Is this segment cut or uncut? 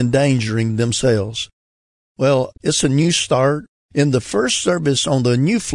cut